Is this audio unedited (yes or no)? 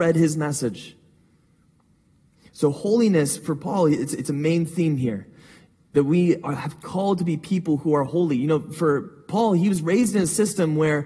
yes